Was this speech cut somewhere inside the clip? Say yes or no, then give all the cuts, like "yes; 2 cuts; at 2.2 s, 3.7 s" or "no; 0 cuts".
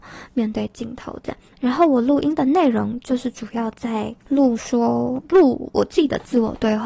yes; 2 cuts; at 1.5 s, 4.2 s